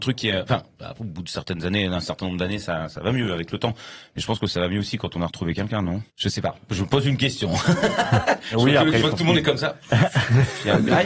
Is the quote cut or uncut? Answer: cut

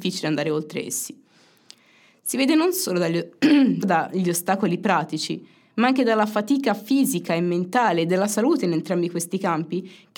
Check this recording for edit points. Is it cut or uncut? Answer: cut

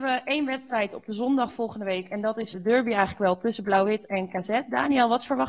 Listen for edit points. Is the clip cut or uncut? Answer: cut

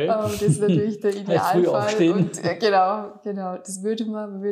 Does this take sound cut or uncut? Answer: uncut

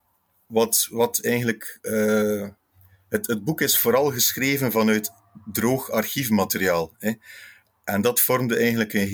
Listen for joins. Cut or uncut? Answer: uncut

